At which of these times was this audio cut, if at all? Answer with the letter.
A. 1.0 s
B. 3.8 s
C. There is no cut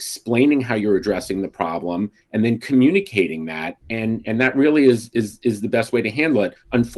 B